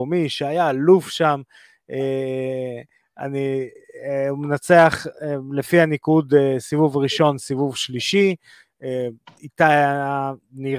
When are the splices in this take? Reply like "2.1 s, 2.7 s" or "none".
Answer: none